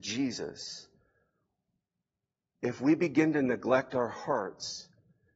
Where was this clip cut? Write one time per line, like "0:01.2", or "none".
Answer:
0:02.5